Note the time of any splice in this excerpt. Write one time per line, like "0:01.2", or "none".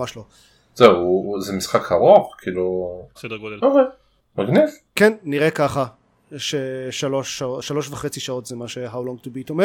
0:03.2